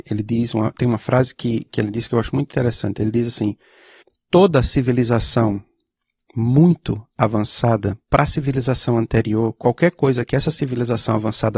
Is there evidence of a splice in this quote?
yes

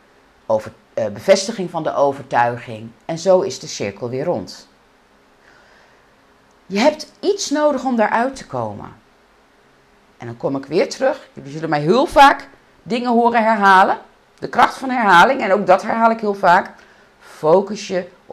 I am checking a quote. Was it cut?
no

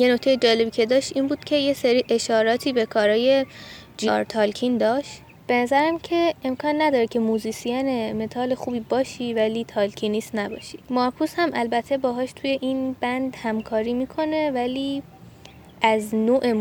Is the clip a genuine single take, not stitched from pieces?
no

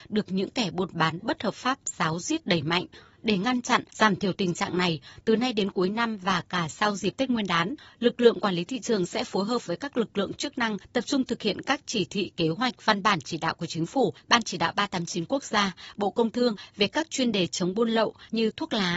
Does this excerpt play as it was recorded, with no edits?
no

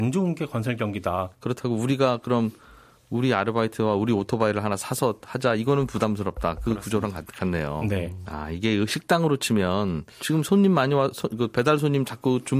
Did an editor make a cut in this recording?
yes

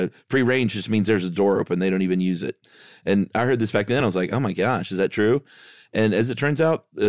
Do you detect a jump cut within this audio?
no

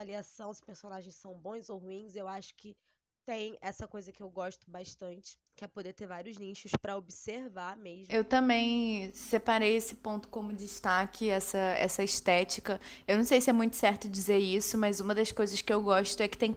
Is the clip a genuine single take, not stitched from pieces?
no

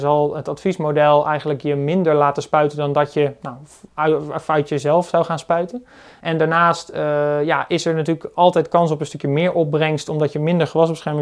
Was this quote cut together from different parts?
no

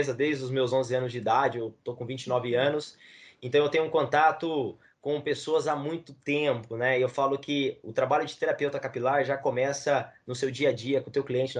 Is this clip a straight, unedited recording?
yes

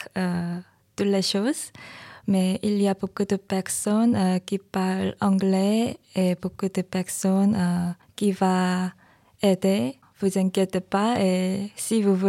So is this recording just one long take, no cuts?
yes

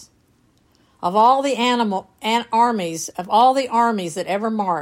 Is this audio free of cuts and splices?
yes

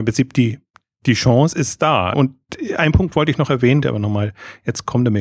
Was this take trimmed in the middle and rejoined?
yes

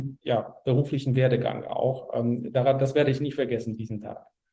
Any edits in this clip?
no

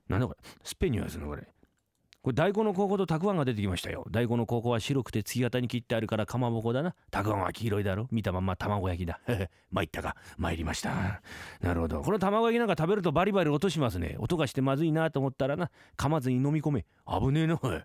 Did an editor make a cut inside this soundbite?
no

